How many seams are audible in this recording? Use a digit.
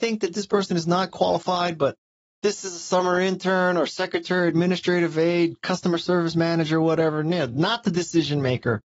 0